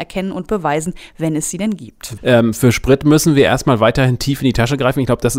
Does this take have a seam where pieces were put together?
yes; 1 cut; at 2.2 s

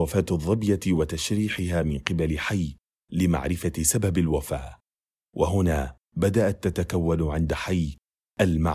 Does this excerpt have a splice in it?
yes; 1 cut; at 6.0 s

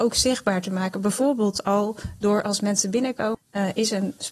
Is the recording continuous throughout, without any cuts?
no; 1 cut; at 3.3 s

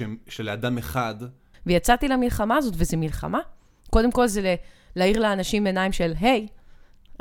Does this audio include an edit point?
yes; 1 cut; at 1.5 s

